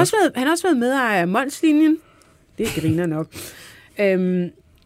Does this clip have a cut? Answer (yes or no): no